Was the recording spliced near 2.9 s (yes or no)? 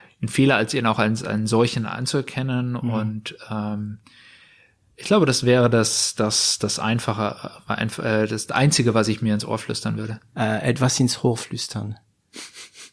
no